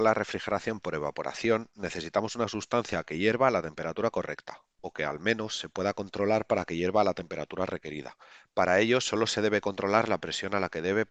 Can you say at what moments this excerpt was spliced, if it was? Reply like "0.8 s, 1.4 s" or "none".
none